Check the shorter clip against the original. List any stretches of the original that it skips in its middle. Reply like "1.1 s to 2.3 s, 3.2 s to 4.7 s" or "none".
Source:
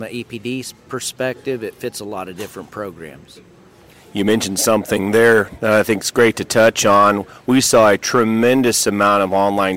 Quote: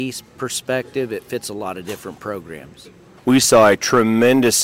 3.7 s to 7.4 s